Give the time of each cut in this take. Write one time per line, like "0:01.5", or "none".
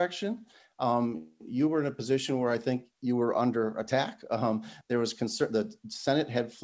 none